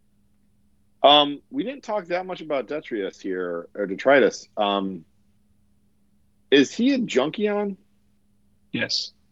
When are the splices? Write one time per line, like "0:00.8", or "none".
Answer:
none